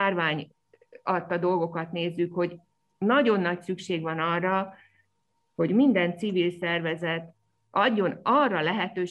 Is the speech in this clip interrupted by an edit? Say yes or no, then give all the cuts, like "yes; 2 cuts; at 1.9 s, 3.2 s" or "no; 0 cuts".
no; 0 cuts